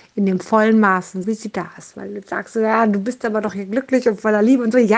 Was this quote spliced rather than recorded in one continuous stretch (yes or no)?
yes